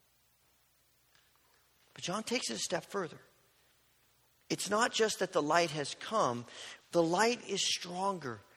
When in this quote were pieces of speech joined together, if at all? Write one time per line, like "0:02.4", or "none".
0:06.8